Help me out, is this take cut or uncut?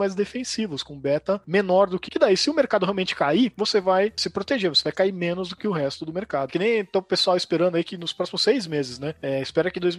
cut